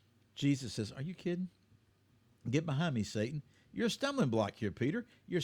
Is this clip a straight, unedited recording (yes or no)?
yes